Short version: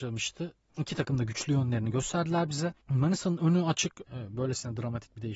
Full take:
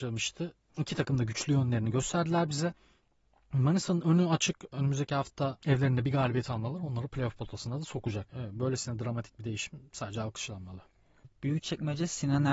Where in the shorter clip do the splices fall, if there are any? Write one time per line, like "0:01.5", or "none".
0:02.8
0:04.1